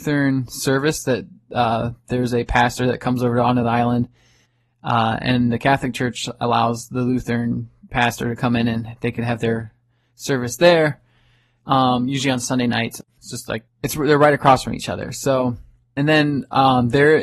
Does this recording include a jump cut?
yes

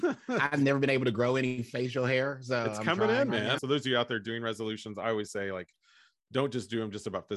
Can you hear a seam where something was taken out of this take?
yes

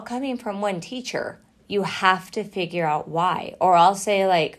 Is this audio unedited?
no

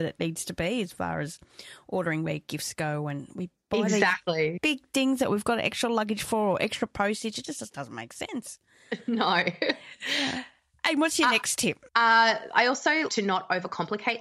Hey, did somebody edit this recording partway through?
yes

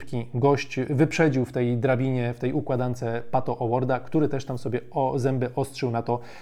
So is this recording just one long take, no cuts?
yes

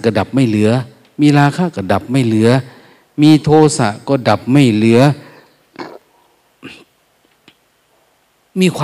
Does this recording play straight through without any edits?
yes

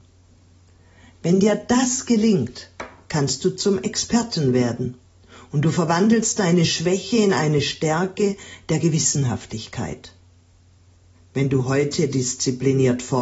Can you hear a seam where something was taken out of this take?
yes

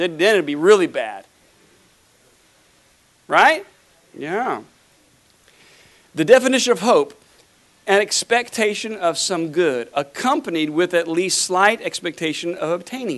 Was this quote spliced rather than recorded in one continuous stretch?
no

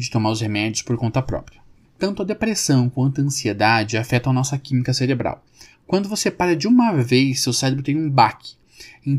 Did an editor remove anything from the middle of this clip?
yes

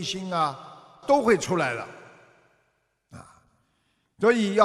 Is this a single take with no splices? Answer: no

